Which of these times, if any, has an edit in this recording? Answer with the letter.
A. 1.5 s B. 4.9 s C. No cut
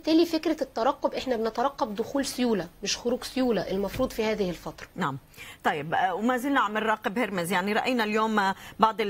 B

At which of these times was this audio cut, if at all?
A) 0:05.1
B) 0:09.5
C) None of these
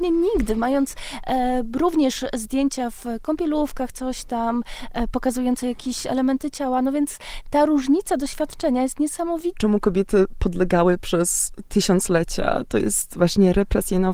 B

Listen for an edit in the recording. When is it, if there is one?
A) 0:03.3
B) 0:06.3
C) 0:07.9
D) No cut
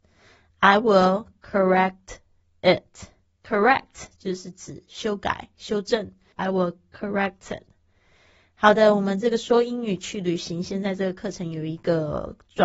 B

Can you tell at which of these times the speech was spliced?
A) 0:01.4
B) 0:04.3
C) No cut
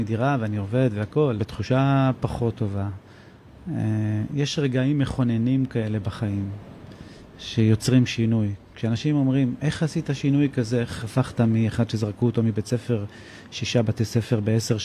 A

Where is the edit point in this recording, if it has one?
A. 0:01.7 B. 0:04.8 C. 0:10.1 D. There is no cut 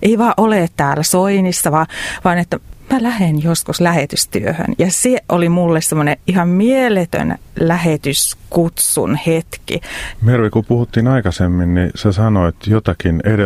C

